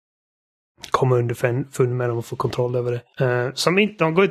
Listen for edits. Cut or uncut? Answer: cut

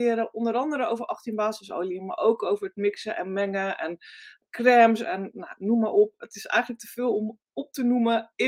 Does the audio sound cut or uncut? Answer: uncut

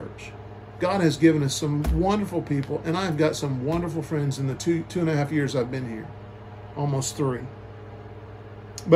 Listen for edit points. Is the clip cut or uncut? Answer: uncut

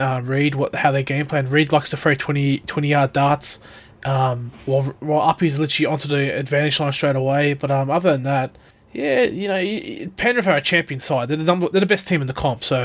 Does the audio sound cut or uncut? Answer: uncut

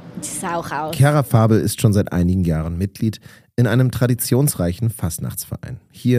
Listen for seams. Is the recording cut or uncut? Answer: uncut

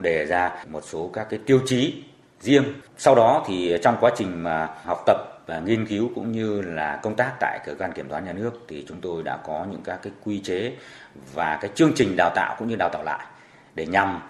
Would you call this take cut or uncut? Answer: cut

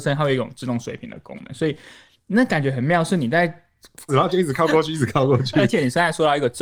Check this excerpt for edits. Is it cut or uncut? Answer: cut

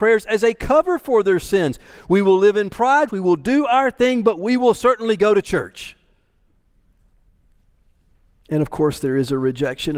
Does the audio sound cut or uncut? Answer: cut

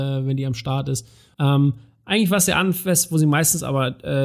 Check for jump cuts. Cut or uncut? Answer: cut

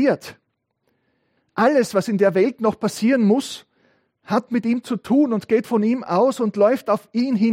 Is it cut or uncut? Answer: cut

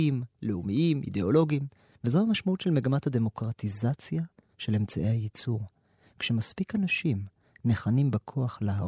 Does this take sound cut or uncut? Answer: cut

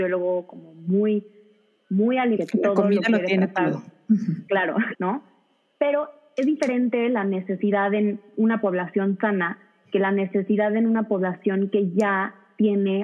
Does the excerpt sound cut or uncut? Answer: cut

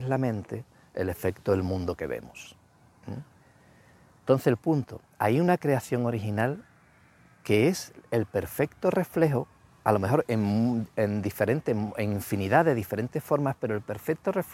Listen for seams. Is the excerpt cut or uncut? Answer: uncut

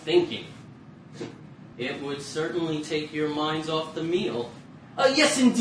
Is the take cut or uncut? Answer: cut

